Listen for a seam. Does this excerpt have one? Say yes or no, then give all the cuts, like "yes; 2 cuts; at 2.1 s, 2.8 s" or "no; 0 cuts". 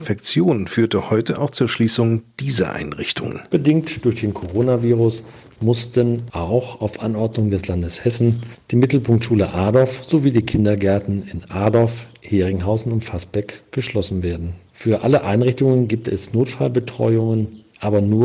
no; 0 cuts